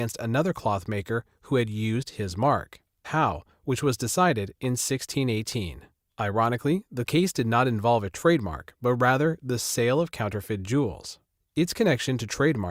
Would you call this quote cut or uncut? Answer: cut